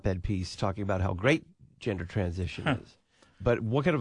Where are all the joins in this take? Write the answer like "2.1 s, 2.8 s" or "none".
none

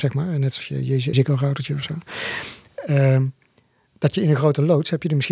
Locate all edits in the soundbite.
1.1 s

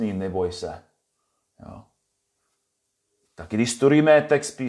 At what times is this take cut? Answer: none

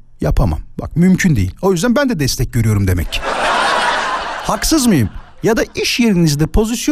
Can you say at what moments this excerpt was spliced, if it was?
none

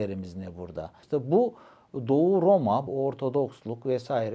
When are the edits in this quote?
1.0 s, 2.9 s

